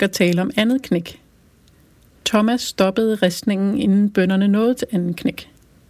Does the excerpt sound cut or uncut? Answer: uncut